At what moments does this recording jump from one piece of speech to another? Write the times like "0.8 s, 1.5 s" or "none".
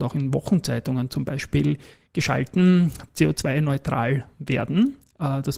3.1 s